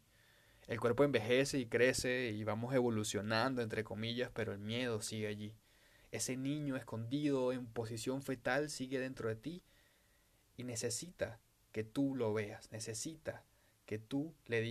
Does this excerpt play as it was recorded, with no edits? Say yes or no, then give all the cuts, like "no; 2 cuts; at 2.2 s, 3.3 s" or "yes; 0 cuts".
yes; 0 cuts